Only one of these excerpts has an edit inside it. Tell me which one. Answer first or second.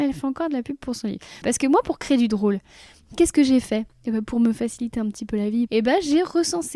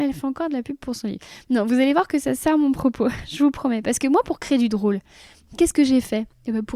first